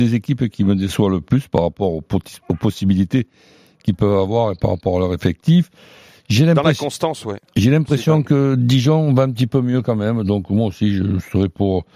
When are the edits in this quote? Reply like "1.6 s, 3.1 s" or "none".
none